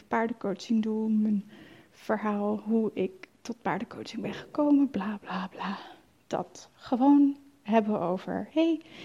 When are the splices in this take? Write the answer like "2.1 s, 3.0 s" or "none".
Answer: none